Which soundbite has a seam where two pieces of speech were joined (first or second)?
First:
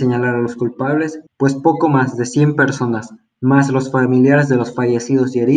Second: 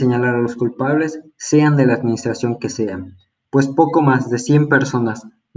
first